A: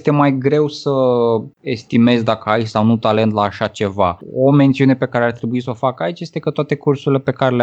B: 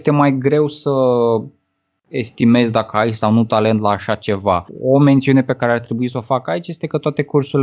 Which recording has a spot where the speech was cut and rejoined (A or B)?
A